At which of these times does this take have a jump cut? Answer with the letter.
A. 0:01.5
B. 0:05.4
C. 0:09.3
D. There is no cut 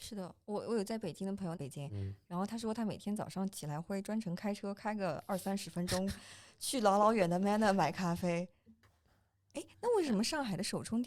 A